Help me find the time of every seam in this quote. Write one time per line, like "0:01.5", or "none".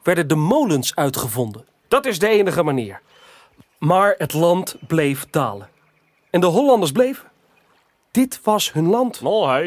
0:01.8